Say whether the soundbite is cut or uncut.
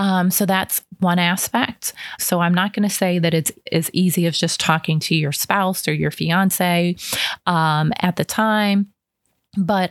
cut